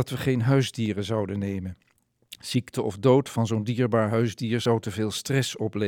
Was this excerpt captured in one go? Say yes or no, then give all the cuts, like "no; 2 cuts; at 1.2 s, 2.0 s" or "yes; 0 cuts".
yes; 0 cuts